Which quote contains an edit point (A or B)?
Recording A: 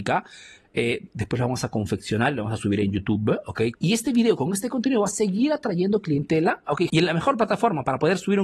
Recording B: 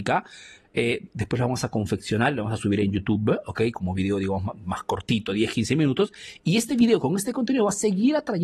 A